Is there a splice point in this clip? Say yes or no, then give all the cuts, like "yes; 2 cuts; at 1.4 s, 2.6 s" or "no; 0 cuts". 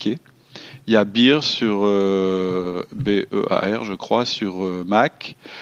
no; 0 cuts